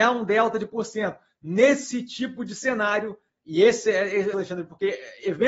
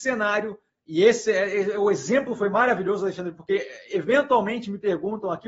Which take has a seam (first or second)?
first